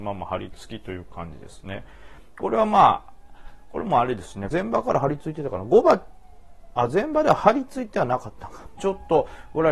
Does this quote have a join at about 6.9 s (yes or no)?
no